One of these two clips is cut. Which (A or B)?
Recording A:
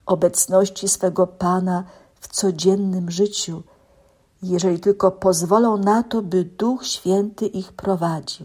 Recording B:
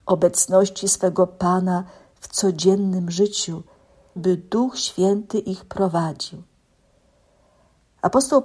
B